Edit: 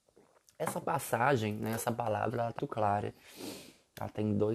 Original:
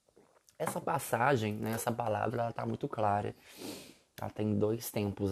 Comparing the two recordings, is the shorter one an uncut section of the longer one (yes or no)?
no